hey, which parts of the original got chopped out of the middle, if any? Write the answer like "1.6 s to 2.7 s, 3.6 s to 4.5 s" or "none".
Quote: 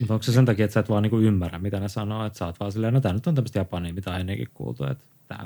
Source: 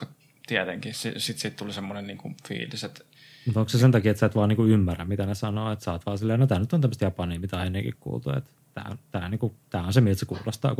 none